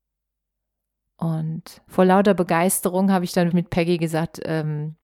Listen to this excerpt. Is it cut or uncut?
cut